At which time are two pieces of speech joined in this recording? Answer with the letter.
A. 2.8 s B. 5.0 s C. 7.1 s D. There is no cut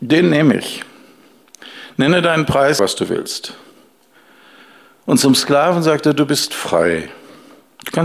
A